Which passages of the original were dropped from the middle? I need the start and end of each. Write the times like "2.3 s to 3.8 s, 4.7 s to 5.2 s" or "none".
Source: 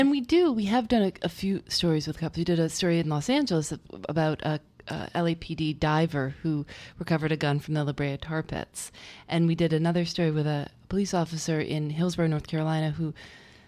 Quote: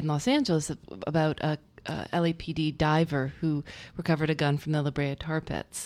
none